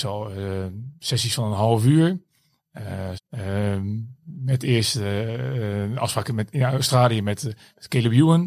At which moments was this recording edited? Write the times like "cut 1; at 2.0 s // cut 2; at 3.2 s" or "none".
cut 1; at 3.1 s